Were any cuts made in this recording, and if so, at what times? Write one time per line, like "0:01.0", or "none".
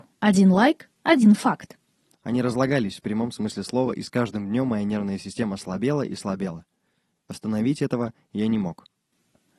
0:02.1